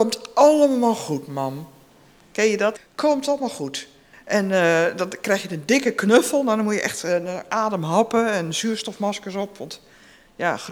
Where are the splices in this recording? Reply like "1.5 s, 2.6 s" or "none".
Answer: 2.8 s, 4.1 s